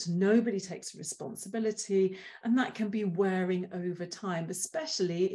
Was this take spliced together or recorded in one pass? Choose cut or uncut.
uncut